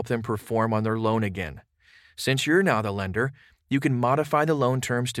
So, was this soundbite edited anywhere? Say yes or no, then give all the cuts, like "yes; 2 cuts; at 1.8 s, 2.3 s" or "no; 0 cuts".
no; 0 cuts